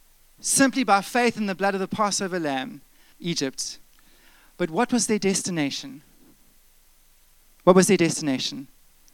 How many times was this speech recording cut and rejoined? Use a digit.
1